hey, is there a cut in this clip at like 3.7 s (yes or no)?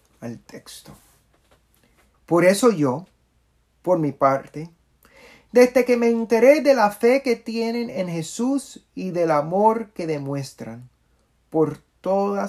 no